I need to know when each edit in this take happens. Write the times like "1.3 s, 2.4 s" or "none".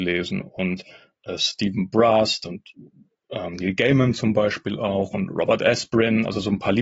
3.5 s